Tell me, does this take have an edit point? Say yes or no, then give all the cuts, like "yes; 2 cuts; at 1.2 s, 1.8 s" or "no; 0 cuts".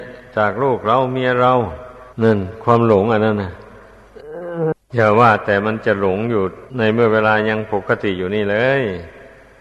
yes; 2 cuts; at 2.1 s, 6.7 s